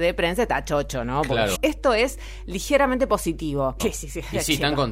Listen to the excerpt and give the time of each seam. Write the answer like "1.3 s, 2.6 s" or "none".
1.5 s, 3.8 s